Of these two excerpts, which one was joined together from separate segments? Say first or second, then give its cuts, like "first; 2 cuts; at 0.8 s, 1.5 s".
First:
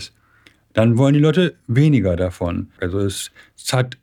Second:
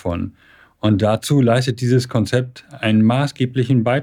first; 1 cut; at 2.8 s